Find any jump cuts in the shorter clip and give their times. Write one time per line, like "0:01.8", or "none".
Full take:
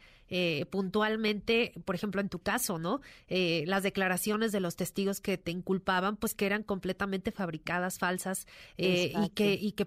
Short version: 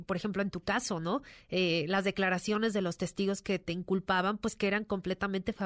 none

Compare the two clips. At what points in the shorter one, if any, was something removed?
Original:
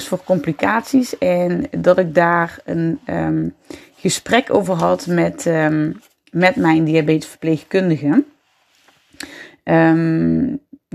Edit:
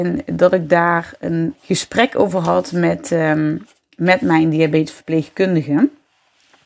0:01.5

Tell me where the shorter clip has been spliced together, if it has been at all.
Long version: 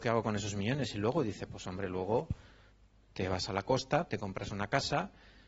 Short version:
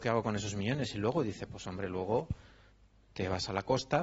none

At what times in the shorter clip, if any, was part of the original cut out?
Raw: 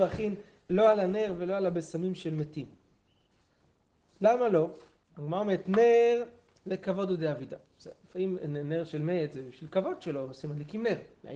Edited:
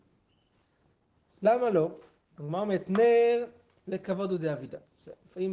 none

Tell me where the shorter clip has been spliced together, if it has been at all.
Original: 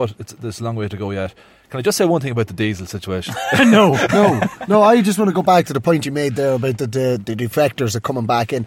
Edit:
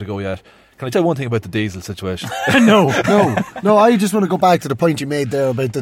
0:00.9

